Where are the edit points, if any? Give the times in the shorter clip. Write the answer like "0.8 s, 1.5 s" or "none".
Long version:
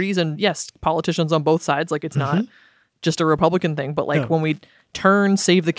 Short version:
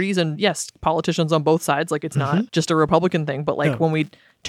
2.5 s